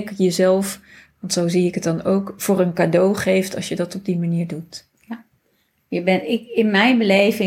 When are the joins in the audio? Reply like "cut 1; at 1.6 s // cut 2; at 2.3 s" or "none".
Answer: none

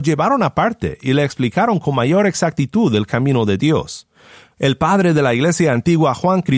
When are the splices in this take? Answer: cut 1; at 4.5 s

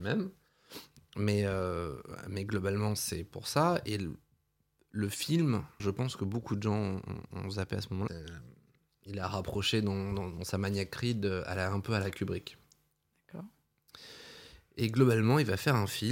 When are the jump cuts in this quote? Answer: cut 1; at 5.8 s // cut 2; at 8.1 s

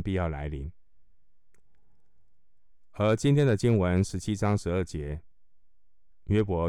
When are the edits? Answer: none

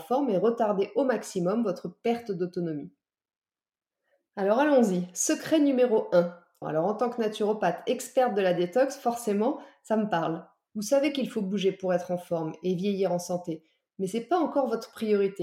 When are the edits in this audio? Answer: cut 1; at 6.6 s // cut 2; at 10.7 s

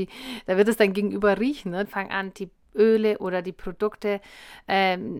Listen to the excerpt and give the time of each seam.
cut 1; at 1.8 s

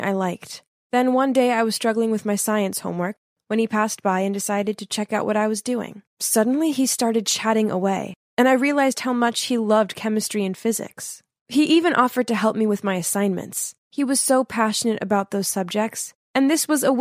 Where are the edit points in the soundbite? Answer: none

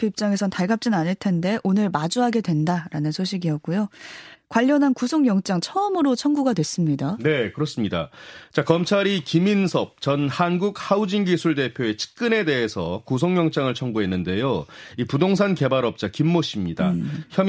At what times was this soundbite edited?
cut 1; at 4.3 s

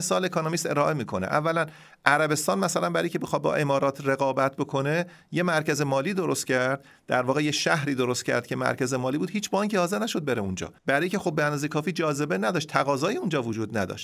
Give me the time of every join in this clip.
cut 1; at 10.8 s

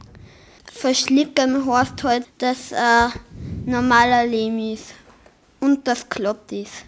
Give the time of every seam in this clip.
cut 1; at 2.2 s

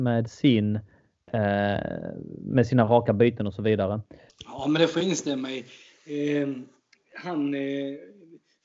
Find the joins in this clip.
cut 1; at 4.3 s

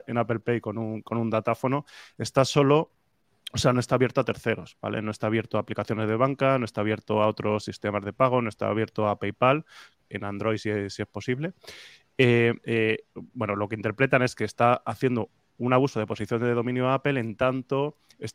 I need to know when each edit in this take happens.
cut 1; at 10.1 s // cut 2; at 12.6 s

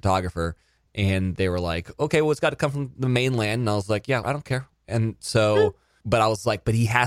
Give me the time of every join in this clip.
cut 1; at 4.2 s

